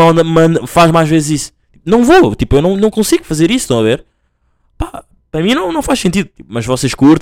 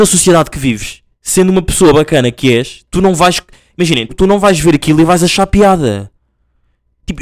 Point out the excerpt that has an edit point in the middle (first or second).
second